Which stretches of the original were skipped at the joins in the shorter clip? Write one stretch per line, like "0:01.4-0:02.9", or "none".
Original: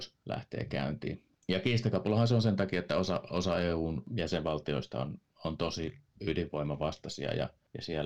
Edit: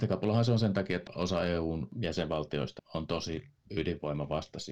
0:02.9-0:03.2
0:04.9-0:05.3